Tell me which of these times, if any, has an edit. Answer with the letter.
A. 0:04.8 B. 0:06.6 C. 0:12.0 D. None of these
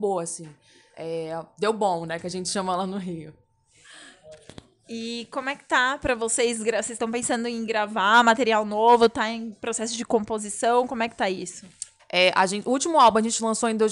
C